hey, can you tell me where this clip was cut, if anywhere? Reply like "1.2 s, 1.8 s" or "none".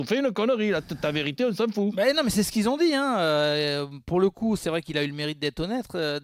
none